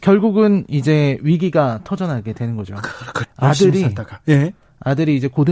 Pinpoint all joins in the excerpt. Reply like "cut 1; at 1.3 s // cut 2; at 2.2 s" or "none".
cut 1; at 3.2 s